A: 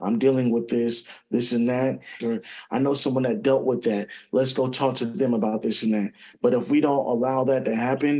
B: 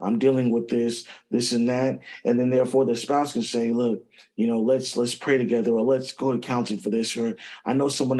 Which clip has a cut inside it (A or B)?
A